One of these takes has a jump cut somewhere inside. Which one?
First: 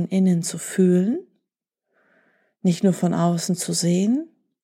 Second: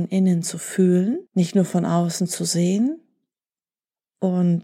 second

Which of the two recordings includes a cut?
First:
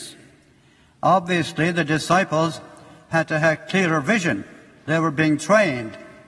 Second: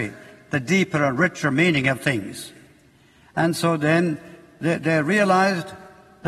second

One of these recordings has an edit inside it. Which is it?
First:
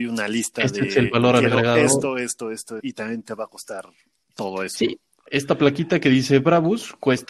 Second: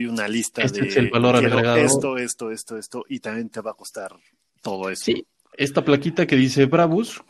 first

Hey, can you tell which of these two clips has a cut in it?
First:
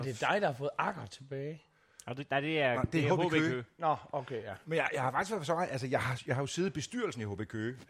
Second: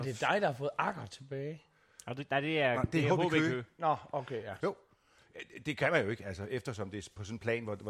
second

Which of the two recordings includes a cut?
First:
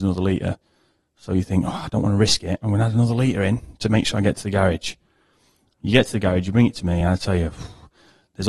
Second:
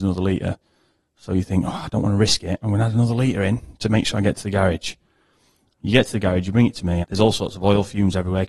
second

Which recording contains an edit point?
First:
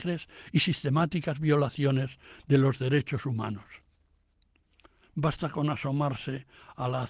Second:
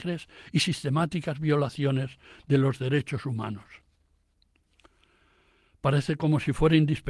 first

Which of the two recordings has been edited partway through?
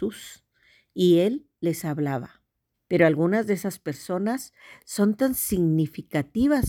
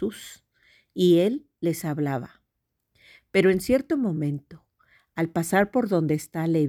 first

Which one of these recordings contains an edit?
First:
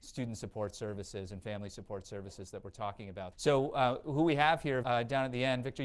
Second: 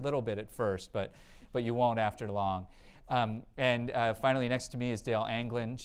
first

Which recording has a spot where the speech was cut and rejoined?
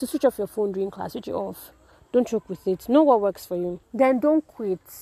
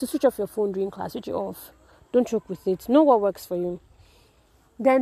first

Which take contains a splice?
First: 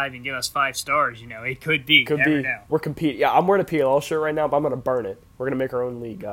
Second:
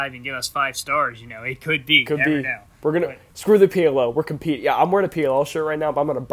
first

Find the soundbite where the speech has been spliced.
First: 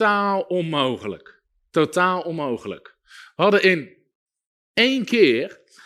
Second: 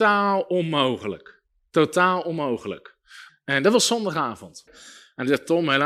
second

